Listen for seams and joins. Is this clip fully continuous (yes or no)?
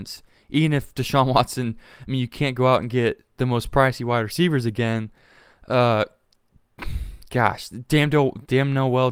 yes